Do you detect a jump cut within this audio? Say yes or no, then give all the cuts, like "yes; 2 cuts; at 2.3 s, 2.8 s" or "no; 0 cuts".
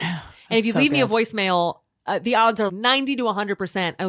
yes; 1 cut; at 2.7 s